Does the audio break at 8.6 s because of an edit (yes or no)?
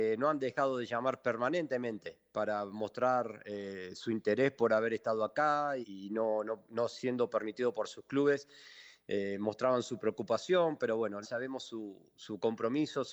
no